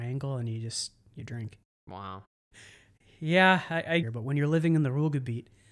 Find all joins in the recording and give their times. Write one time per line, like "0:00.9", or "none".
0:02.5
0:04.0